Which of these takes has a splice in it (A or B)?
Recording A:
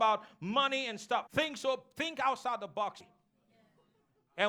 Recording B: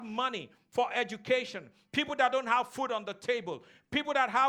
A